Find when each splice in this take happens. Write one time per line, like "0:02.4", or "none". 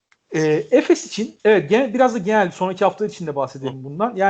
0:01.4